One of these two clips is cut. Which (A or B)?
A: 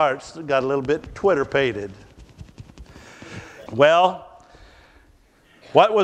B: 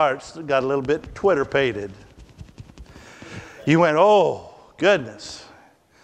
A